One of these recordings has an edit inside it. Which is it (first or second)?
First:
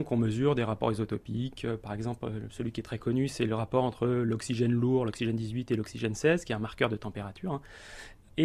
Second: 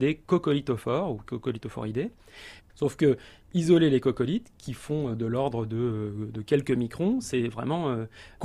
second